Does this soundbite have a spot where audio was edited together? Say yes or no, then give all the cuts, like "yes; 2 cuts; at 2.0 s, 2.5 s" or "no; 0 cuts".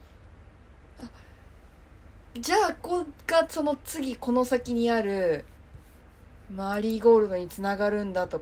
yes; 1 cut; at 2.8 s